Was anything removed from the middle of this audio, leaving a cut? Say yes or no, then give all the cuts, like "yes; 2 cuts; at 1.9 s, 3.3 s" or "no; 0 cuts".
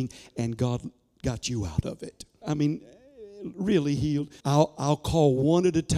yes; 2 cuts; at 2.4 s, 4.4 s